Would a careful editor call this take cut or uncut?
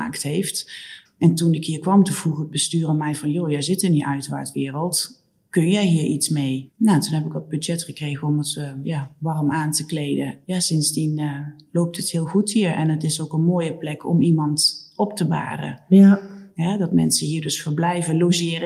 cut